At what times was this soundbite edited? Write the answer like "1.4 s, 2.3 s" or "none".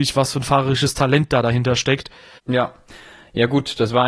2.4 s